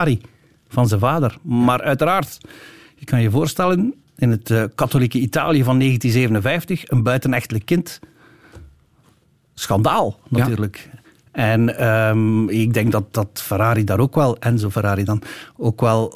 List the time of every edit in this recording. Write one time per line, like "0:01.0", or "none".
none